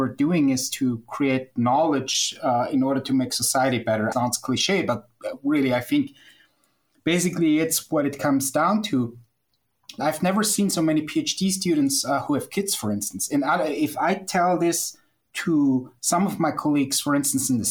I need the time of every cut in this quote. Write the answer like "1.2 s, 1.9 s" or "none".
4.1 s, 10.0 s